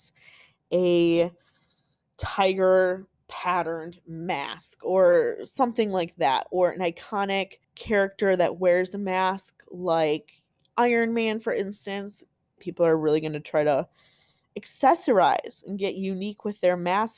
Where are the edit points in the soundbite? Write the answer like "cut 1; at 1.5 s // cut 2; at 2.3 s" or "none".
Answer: cut 1; at 7.6 s // cut 2; at 12.6 s